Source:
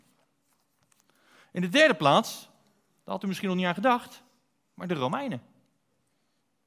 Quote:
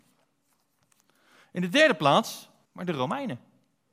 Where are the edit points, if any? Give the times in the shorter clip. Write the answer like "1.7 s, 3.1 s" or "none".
2.7 s